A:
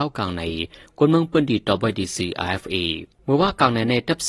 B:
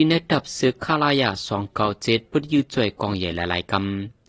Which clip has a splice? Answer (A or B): A